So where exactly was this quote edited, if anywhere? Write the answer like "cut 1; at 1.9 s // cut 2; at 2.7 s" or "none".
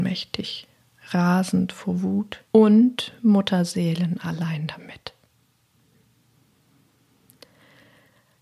cut 1; at 2.5 s